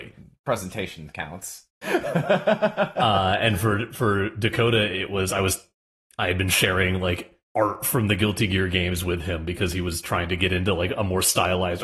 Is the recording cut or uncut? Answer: cut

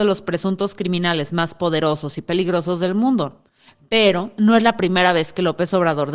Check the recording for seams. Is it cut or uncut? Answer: uncut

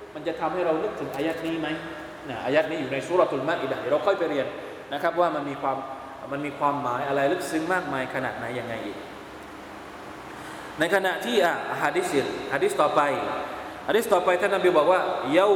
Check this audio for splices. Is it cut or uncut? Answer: uncut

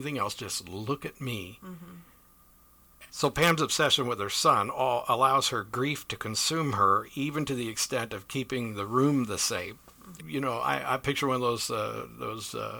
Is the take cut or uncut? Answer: cut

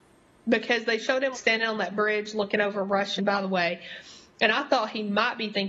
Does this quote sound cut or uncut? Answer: cut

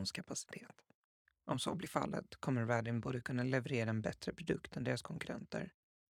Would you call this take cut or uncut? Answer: cut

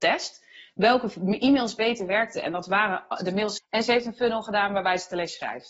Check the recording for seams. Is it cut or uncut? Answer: cut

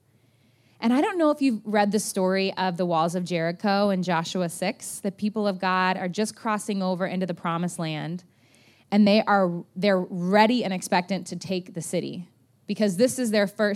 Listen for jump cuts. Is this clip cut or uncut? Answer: uncut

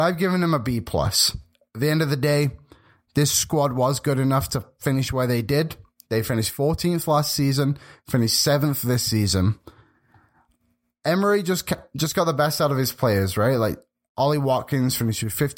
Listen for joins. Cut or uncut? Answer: uncut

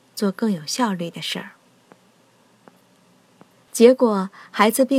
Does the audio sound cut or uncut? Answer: cut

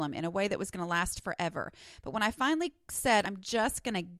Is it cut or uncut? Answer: cut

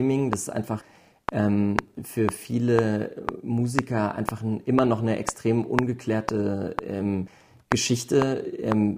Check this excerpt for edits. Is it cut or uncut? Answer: uncut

